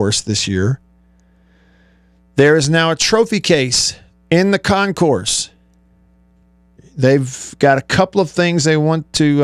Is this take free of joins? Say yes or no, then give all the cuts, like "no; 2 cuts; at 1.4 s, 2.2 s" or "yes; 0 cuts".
no; 1 cut; at 6.8 s